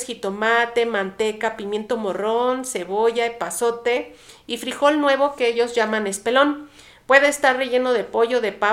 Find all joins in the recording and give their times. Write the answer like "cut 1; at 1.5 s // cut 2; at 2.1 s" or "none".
none

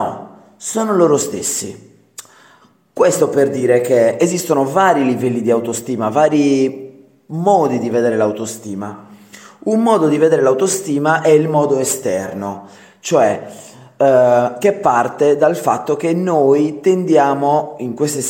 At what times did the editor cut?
none

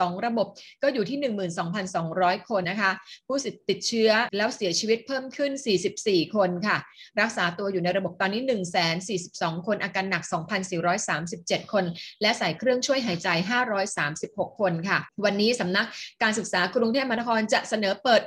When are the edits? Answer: cut 1; at 2.6 s

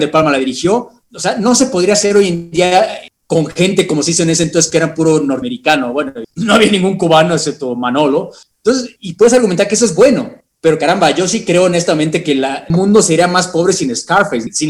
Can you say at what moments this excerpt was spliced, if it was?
none

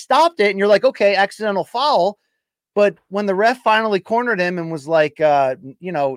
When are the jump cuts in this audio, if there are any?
none

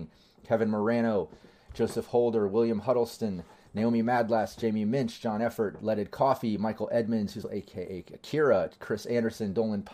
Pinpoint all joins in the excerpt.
cut 1; at 7.4 s

